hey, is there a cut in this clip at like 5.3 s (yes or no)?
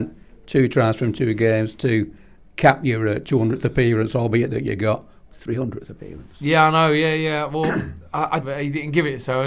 yes